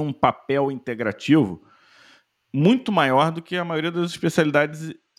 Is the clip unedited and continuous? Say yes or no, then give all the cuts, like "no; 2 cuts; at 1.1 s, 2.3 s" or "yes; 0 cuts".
yes; 0 cuts